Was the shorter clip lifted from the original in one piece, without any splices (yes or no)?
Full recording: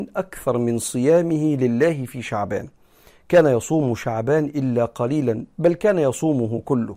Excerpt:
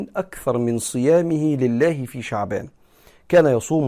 yes